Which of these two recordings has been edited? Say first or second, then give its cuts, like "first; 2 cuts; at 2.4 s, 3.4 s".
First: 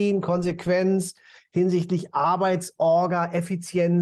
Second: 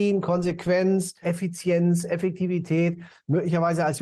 second; 1 cut; at 1.2 s